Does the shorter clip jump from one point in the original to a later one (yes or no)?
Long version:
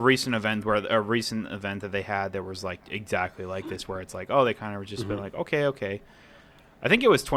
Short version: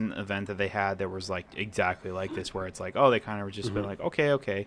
no